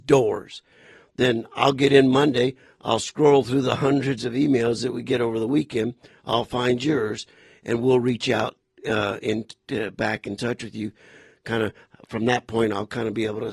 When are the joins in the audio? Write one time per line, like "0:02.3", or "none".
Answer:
none